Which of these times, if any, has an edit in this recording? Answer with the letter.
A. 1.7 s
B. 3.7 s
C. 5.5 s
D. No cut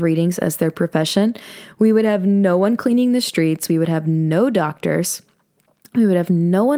D